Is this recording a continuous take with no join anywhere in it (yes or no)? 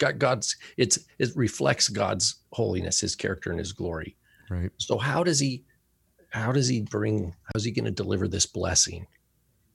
yes